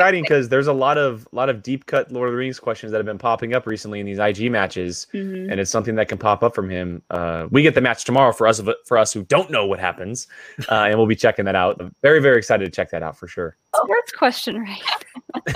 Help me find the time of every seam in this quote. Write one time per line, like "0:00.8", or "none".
0:11.8
0:13.7